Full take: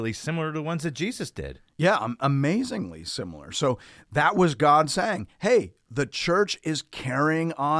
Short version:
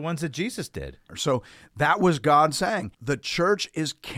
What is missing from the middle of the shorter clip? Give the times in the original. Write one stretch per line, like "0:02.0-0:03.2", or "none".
0:01.7-0:03.5
0:05.3-0:05.8